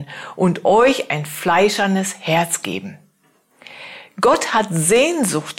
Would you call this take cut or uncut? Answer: uncut